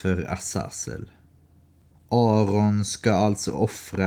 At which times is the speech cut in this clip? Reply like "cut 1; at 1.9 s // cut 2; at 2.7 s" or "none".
cut 1; at 1.9 s